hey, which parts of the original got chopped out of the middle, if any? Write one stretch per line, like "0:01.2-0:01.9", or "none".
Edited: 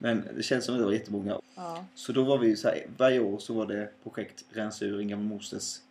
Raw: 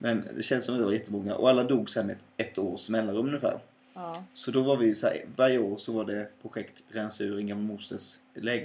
0:01.4-0:03.7